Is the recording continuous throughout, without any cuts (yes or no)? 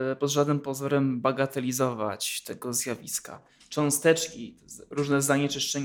yes